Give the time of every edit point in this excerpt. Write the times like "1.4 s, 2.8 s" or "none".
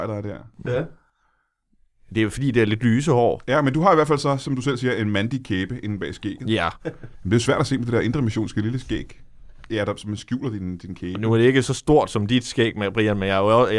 6.8 s, 9.7 s